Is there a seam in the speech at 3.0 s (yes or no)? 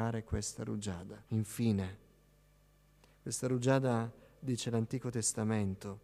no